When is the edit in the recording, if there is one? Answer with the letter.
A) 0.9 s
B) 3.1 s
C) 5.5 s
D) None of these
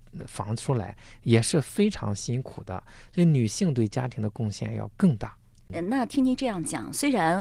B